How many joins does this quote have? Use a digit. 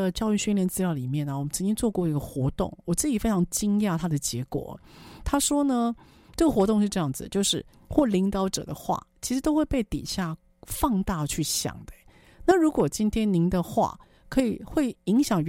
1